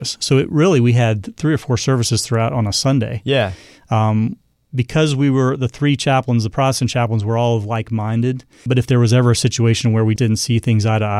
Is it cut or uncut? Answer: cut